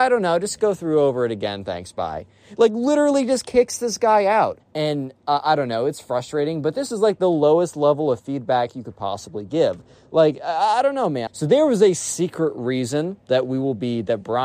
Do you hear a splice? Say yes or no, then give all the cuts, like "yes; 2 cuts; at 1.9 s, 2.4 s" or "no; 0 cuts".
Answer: yes; 2 cuts; at 4.6 s, 11.3 s